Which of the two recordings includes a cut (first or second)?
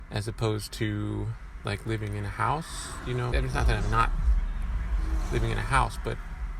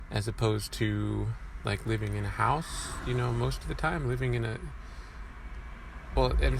first